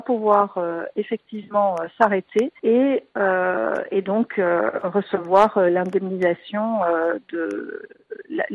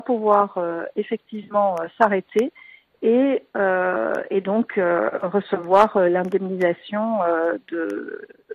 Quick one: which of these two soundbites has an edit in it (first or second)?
first